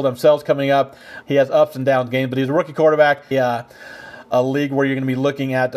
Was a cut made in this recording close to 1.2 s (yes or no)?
yes